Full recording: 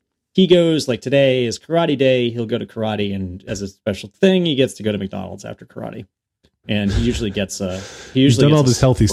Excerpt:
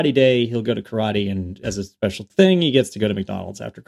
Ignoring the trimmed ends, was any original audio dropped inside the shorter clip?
no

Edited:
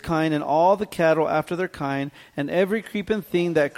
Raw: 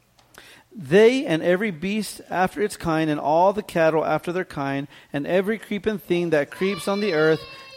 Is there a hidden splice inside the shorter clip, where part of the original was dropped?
no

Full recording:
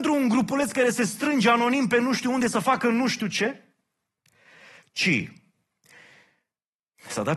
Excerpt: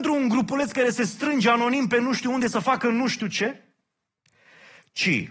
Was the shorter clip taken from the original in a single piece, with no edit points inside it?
yes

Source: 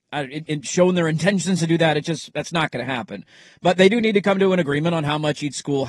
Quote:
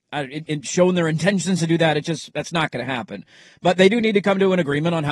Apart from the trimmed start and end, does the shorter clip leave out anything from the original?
no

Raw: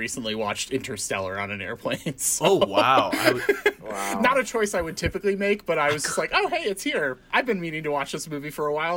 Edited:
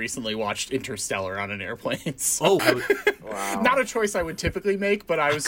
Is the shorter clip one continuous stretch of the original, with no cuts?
no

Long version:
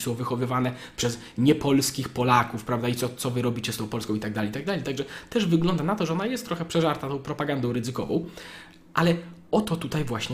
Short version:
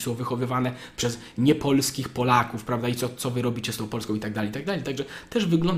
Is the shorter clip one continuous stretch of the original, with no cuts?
yes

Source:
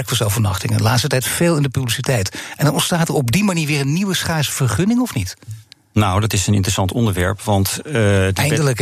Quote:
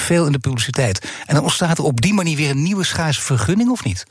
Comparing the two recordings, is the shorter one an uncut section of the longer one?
yes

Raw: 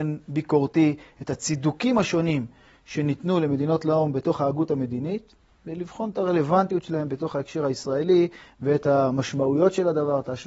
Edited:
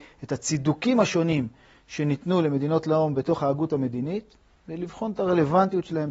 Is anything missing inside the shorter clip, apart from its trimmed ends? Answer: no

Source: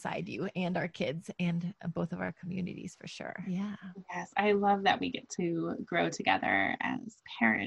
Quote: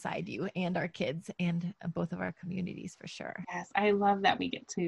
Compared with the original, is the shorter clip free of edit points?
no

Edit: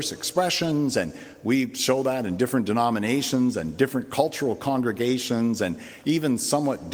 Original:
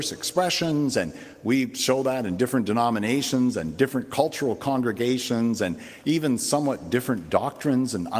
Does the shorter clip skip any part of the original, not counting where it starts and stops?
no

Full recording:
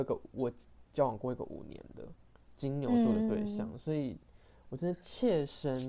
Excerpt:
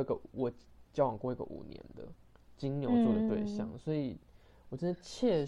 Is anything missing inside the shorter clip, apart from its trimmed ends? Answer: no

